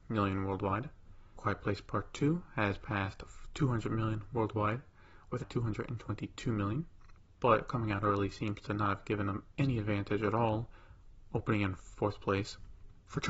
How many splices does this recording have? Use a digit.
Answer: 2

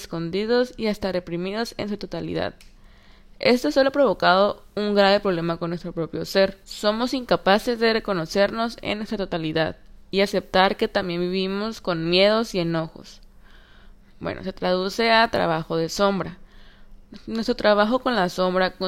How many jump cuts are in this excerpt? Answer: 2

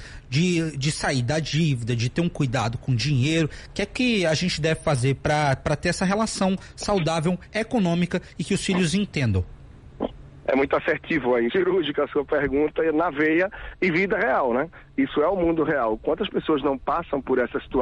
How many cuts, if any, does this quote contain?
1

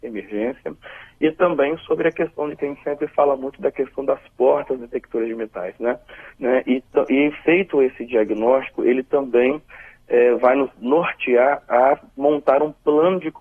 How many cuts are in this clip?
1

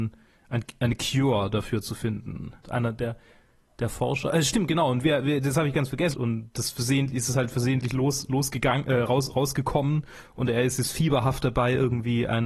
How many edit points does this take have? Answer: 2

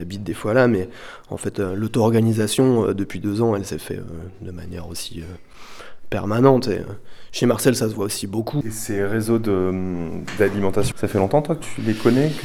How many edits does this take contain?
2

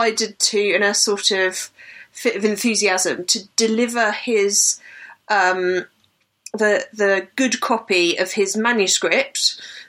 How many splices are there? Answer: 0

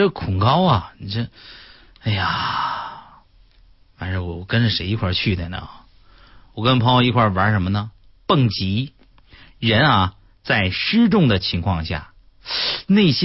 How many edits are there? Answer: 1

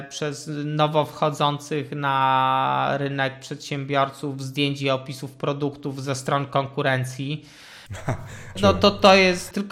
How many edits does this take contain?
1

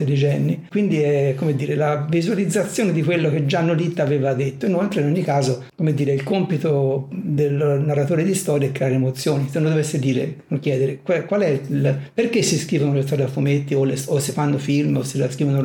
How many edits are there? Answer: 0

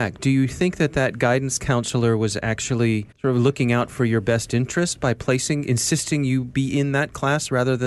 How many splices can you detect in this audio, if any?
1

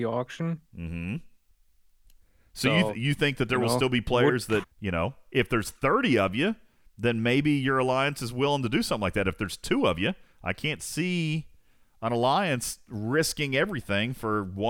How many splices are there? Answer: 1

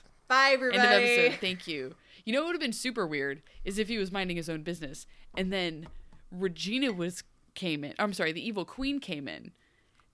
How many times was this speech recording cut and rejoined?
0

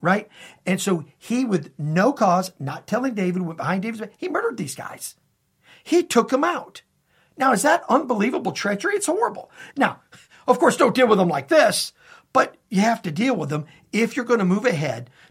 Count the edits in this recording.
1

